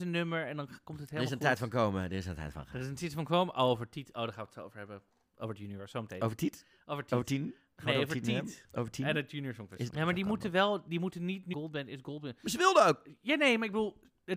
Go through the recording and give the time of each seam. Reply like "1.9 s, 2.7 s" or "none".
9.9 s, 11.5 s